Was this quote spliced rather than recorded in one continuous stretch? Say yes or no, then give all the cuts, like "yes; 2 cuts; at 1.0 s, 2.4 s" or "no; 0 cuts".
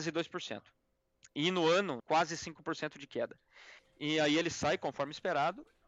yes; 2 cuts; at 2.0 s, 3.8 s